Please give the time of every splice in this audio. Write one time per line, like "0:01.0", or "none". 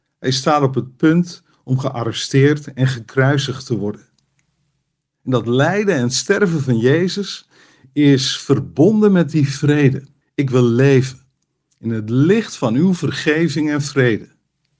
0:10.2